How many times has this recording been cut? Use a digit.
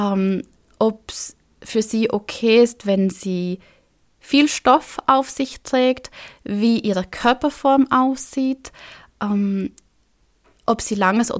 0